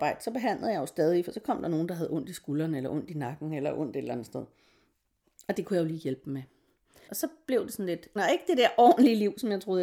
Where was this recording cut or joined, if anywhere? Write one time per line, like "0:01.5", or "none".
0:07.1
0:08.2